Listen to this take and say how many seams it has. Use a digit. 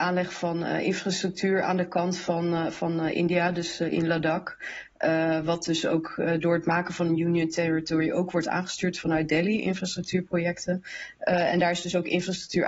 0